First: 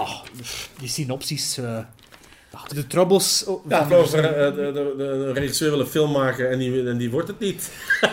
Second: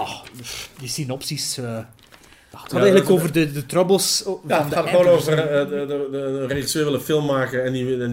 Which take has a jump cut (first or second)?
first